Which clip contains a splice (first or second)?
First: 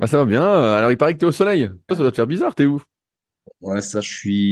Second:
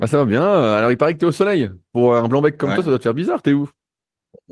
first